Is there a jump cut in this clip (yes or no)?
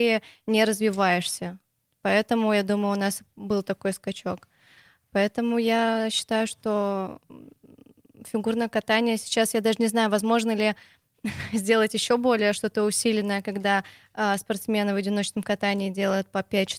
no